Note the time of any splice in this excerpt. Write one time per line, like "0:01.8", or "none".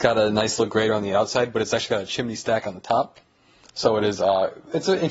none